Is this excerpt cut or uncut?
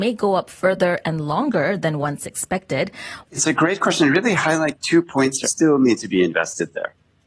cut